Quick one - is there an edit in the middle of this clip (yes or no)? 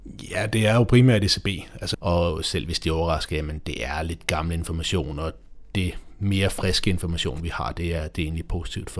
yes